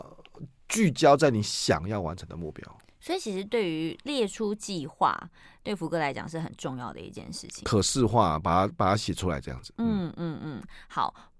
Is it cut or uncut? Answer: uncut